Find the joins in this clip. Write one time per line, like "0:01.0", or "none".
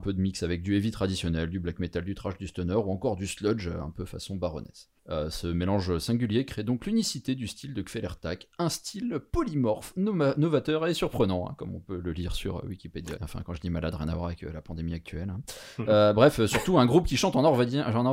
0:05.0
0:13.2